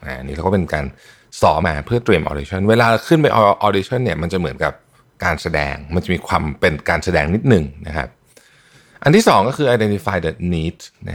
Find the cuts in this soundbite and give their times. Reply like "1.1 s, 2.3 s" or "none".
1.6 s

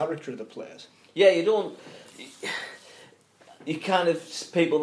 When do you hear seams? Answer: none

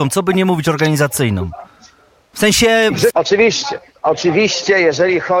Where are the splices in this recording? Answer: 3.1 s

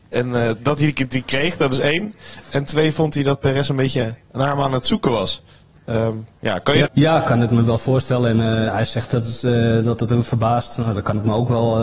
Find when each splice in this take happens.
6.8 s, 8.7 s

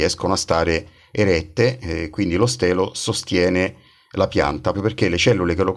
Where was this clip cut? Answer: 4.7 s

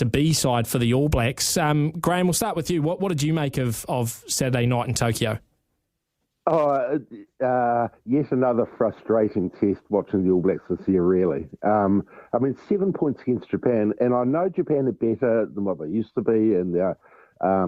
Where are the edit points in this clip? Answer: none

